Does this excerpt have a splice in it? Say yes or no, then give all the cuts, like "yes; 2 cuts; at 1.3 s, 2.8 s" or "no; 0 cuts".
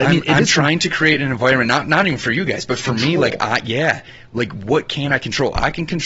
no; 0 cuts